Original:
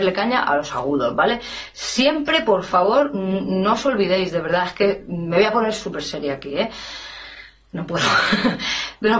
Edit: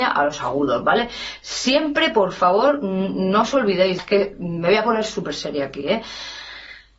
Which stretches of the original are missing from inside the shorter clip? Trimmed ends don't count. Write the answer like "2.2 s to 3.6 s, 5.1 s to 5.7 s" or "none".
4.3 s to 4.7 s